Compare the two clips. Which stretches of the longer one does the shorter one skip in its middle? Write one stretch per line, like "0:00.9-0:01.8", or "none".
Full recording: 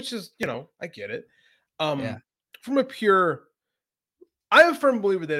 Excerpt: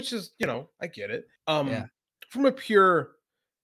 0:01.4-0:01.7